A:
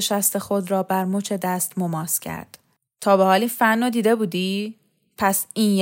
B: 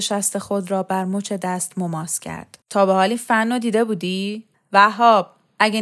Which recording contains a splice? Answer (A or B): B